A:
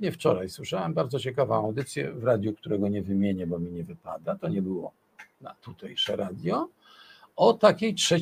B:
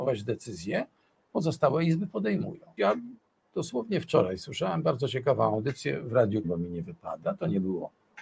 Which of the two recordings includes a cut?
B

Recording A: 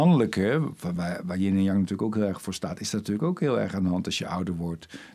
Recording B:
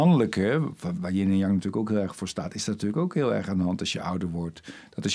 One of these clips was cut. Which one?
B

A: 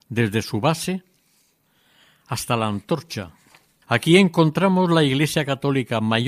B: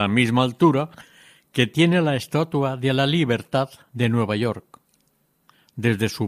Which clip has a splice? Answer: A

